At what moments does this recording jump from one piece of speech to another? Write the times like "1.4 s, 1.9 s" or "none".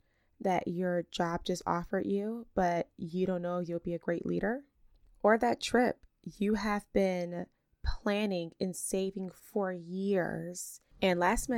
none